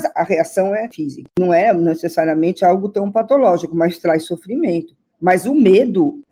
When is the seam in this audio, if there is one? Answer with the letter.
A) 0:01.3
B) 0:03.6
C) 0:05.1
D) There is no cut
D